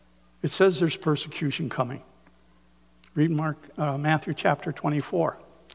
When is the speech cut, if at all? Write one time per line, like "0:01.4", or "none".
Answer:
none